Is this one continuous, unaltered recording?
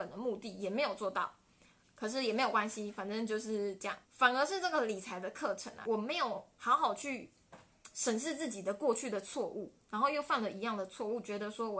no; 2 cuts; at 4.0 s, 5.8 s

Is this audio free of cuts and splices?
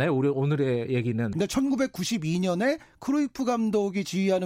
no; 1 cut; at 1.3 s

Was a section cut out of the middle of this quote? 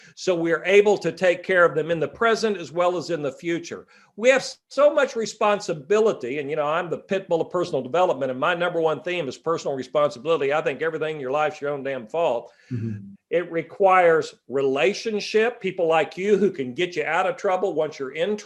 yes; 1 cut; at 13.1 s

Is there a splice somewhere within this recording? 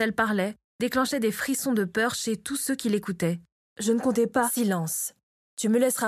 no; 0 cuts

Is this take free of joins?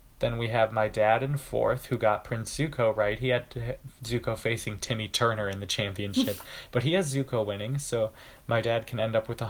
yes; 0 cuts

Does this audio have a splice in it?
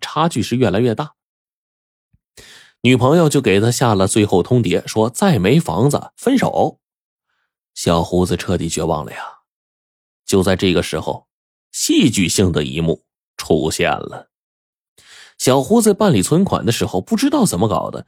no; 0 cuts

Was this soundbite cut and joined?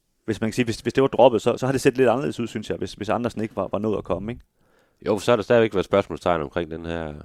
no; 0 cuts

